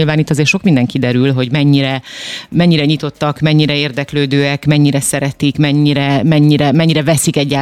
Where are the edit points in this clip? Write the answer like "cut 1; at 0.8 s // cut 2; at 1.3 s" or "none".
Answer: none